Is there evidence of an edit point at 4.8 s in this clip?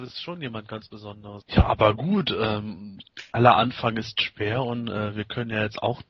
no; 1 cut; at 1.4 s

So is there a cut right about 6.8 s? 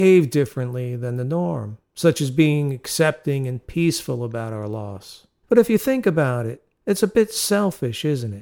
no; 1 cut; at 5.4 s

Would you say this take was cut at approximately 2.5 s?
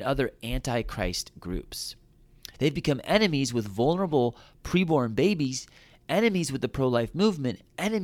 yes; 1 cut; at 2.5 s

